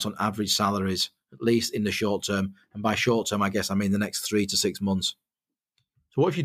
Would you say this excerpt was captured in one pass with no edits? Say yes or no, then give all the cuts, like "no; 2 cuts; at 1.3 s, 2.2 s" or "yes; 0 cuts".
yes; 0 cuts